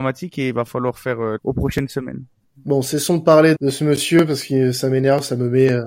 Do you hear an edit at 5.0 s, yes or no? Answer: no